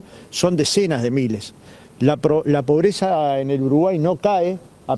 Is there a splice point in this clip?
no; 0 cuts

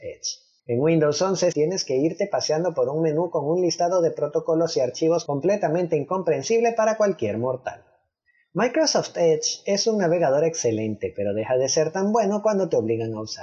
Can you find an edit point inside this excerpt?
yes; 1 cut; at 1.5 s

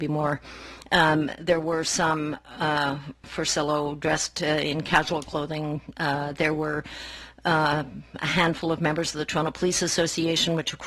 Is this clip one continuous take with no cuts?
no; 1 cut; at 3.2 s

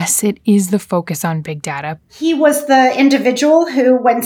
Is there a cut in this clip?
yes; 1 cut; at 2.0 s

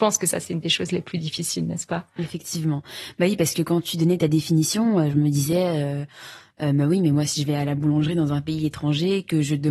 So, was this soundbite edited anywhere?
no; 0 cuts

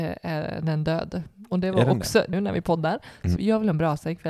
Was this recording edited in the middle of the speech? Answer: yes; 2 cuts; at 2.3 s, 3.4 s

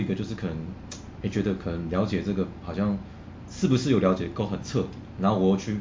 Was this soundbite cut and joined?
no; 0 cuts

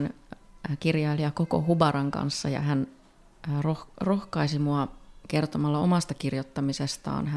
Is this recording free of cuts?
yes; 0 cuts

